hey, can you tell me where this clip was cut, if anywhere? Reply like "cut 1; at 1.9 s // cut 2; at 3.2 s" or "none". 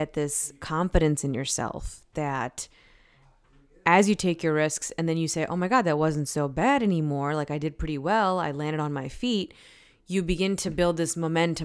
none